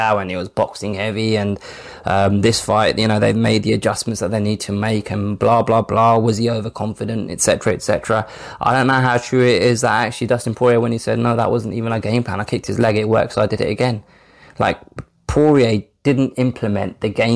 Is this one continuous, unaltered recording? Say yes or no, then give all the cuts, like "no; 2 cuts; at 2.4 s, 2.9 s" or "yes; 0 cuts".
no; 1 cut; at 16.3 s